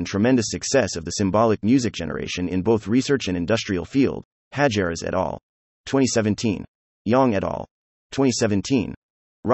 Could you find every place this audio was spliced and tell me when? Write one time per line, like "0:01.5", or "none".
none